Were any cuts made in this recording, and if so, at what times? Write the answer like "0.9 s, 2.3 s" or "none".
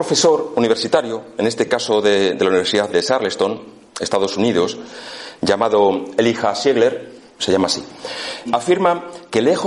2.9 s, 7.4 s, 8.4 s